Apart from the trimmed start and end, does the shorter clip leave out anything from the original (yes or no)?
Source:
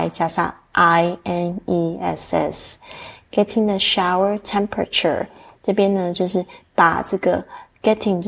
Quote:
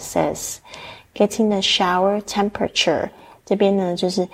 no